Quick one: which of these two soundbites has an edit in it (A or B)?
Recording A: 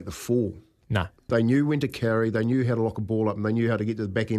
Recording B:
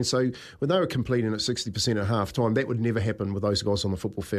A